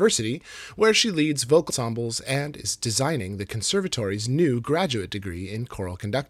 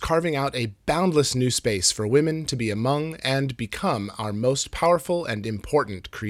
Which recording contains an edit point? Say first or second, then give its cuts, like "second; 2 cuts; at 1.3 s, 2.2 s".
first; 1 cut; at 1.7 s